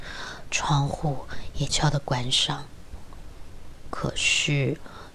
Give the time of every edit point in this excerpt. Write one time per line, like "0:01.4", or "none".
0:01.7
0:03.9